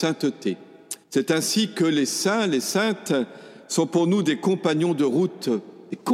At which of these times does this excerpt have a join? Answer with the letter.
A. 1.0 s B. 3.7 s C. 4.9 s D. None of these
A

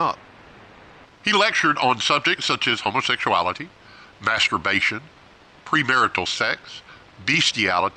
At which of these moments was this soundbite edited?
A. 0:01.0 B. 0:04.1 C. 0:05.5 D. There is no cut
A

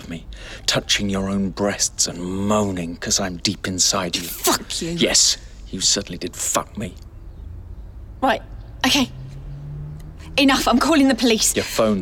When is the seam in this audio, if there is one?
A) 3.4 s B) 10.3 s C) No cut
A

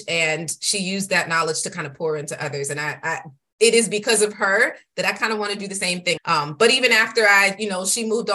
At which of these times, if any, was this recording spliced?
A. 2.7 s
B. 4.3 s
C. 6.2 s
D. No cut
C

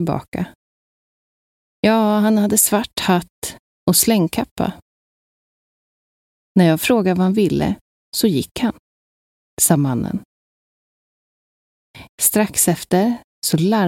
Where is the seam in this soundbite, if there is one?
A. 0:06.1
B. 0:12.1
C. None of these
B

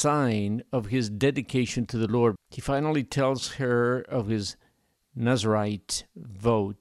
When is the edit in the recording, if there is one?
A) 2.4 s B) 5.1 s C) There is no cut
A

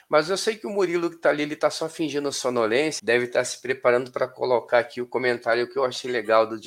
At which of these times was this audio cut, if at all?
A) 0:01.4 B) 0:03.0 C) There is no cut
B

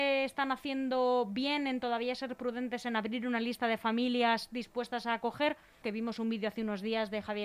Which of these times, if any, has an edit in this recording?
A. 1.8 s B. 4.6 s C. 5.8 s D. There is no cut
C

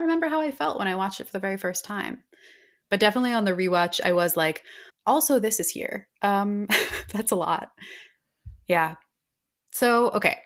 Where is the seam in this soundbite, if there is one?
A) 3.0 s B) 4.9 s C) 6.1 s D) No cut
B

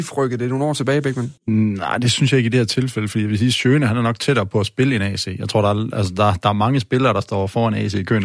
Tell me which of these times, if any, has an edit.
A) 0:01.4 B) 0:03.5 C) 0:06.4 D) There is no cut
A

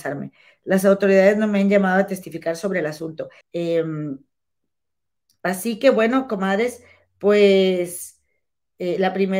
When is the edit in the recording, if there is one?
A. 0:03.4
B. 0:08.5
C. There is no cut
A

